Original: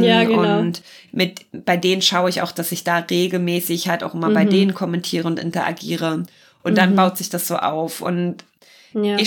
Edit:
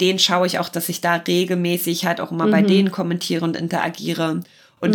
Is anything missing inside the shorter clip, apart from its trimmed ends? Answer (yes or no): no